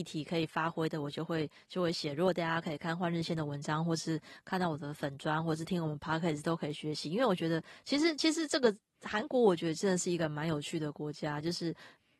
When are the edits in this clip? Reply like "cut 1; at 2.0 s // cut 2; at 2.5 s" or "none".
none